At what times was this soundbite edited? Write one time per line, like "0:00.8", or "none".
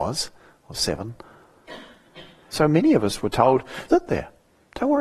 0:02.5
0:03.9